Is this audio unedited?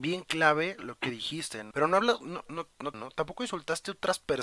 no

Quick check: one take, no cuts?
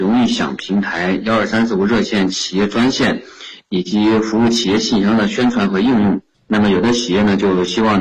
no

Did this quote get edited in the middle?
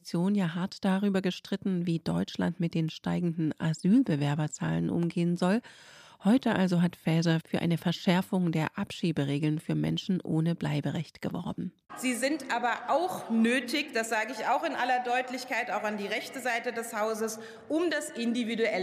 yes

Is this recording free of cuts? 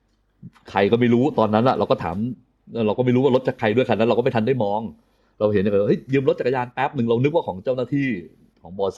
yes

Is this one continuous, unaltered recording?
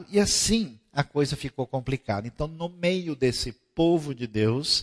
yes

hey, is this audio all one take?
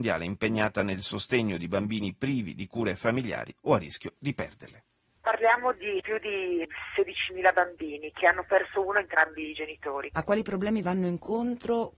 yes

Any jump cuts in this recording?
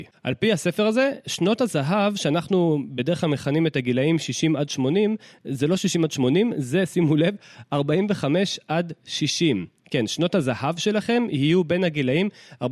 no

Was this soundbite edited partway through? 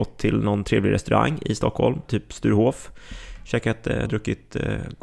yes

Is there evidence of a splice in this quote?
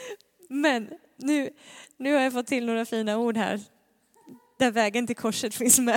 no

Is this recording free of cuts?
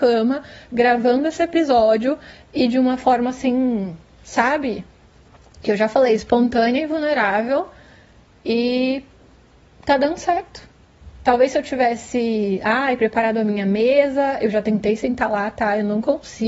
yes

